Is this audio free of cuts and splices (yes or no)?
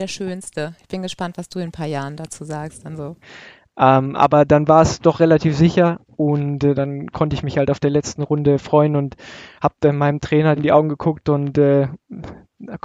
no